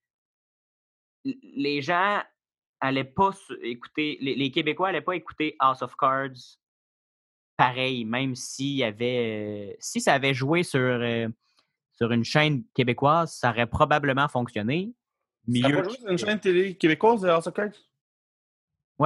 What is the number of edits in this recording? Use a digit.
1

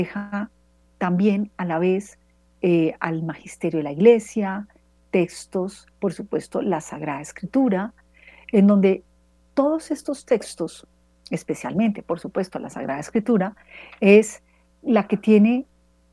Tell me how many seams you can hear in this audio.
0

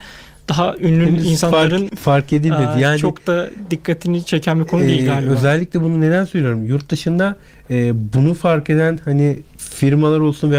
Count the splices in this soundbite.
1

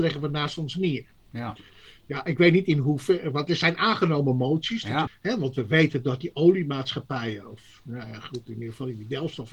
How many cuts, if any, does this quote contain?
1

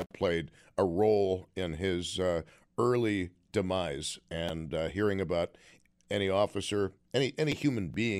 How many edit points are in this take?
0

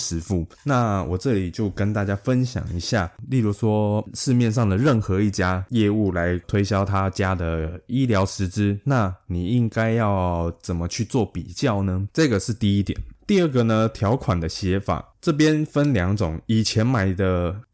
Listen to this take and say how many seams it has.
1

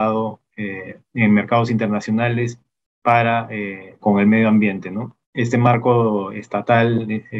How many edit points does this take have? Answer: 3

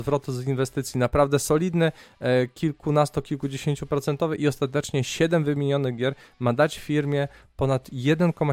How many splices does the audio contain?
0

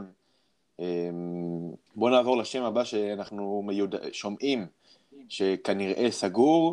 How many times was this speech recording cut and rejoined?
1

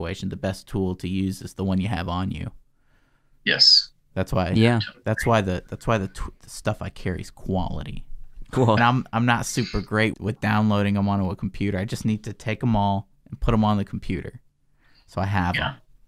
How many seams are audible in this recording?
2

